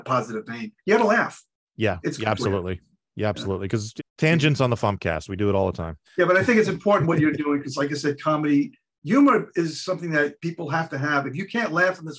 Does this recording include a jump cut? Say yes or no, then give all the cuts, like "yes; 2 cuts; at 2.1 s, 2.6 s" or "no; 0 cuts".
yes; 2 cuts; at 4.0 s, 6.1 s